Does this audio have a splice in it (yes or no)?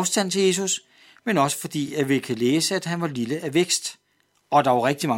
no